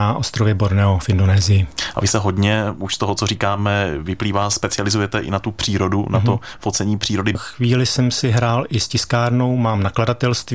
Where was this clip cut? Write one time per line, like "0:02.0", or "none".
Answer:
0:07.3